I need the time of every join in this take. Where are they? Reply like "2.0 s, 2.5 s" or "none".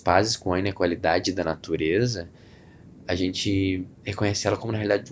3.9 s